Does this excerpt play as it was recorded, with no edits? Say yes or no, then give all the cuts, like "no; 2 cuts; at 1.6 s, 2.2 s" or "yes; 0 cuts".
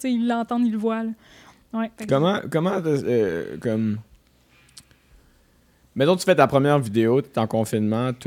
no; 1 cut; at 2.0 s